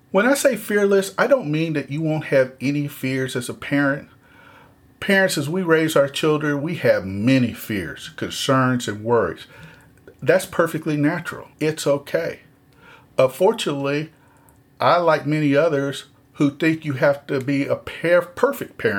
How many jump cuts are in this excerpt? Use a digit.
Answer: 1